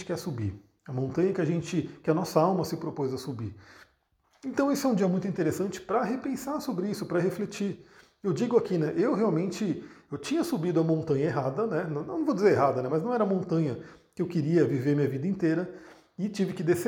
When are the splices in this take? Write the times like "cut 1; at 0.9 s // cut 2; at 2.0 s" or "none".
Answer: none